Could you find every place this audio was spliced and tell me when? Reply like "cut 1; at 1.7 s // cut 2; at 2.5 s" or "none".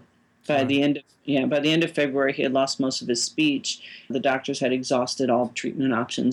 cut 1; at 4.1 s